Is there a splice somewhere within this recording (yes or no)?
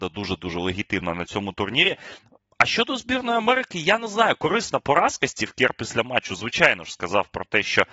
no